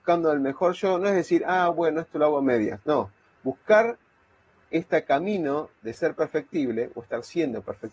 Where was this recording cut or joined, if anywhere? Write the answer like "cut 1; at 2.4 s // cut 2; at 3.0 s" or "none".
none